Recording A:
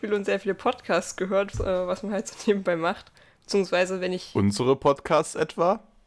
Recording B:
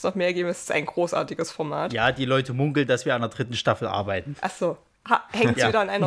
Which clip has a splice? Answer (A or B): A